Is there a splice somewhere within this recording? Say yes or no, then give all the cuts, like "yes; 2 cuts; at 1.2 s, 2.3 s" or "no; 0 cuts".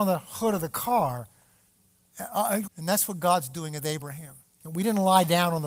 yes; 2 cuts; at 2.7 s, 4.6 s